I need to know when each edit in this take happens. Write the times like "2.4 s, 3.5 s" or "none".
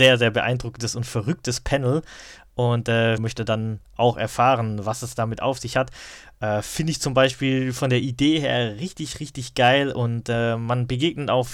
3.2 s